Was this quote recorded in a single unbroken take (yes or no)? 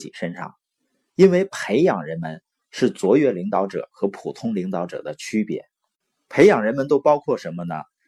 no